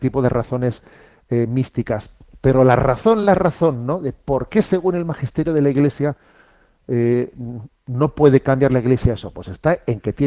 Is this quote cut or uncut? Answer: uncut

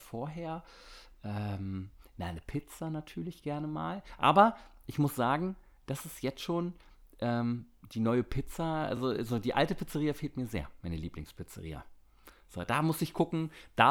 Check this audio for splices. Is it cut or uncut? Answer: uncut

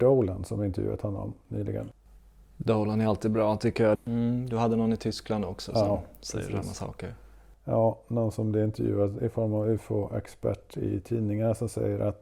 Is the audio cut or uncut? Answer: cut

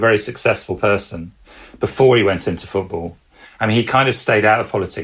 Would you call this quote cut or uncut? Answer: cut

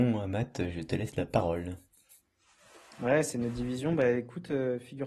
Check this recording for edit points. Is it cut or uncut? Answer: uncut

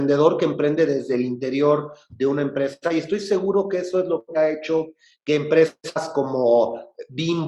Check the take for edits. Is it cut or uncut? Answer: uncut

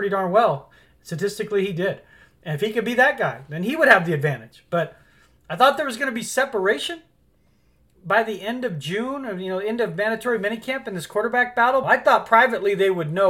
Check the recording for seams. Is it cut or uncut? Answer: cut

